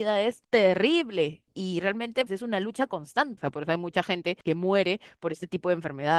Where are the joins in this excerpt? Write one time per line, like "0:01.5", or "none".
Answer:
0:02.3
0:03.4